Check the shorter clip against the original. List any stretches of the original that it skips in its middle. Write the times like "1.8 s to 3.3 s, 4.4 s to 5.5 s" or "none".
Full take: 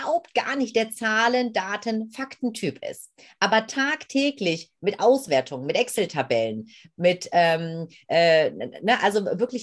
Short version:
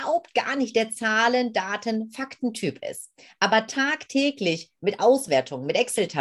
none